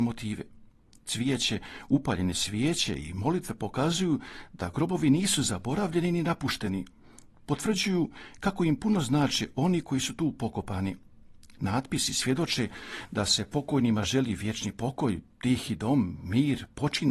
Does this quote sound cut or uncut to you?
uncut